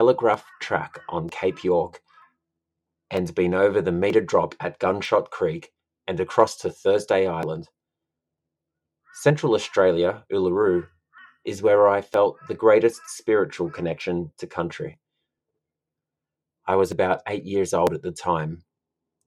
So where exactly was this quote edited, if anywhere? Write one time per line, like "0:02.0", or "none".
0:16.6